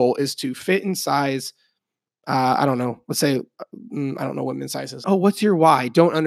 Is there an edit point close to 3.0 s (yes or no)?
no